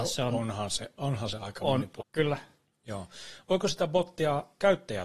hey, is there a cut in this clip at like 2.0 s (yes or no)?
yes